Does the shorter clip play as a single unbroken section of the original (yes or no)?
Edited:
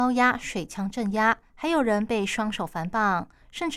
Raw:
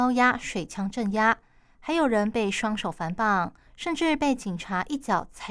no